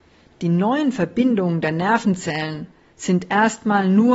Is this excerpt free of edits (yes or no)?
yes